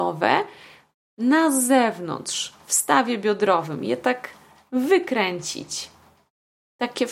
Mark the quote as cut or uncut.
uncut